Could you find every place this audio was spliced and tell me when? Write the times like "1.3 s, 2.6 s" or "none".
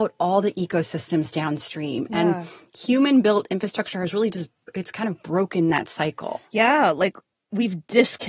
none

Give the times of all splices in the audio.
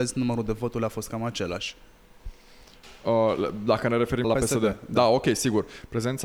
4.2 s

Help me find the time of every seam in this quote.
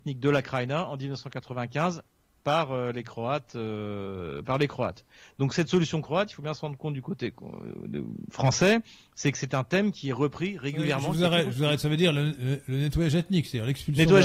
none

